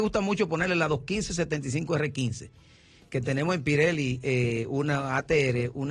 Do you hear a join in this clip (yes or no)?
no